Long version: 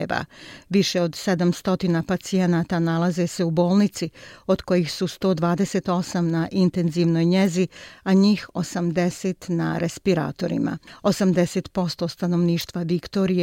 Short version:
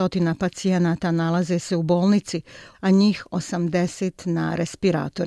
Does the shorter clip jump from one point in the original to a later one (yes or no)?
yes